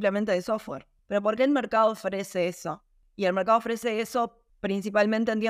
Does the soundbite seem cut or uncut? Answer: cut